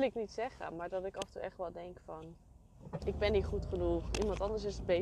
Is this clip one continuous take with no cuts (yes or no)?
no